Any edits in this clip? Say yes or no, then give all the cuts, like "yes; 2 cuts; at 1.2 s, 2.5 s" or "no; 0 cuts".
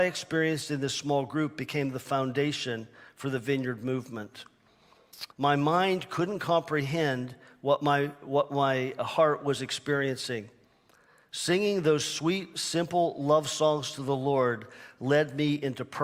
yes; 1 cut; at 5.3 s